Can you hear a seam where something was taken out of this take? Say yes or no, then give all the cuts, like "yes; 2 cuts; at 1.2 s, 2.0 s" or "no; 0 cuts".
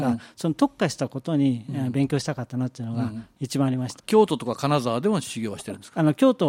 yes; 1 cut; at 4.0 s